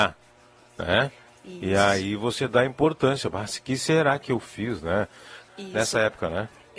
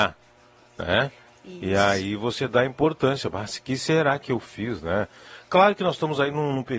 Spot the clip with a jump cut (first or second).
first